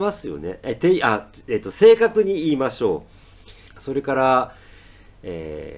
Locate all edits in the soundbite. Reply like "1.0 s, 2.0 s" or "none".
3.7 s

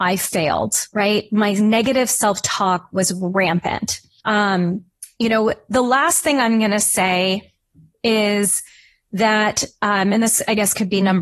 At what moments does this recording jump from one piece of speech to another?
4.2 s

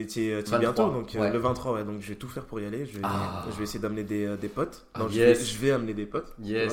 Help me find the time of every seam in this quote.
none

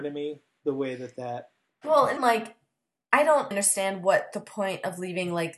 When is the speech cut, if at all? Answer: 2.2 s, 3.5 s

